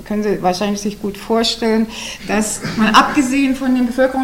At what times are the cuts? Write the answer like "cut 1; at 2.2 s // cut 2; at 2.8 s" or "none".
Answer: none